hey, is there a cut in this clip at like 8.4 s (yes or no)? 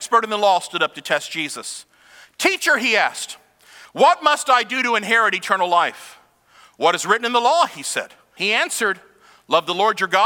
yes